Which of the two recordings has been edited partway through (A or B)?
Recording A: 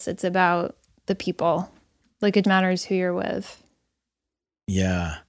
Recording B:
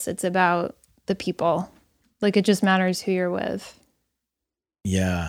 A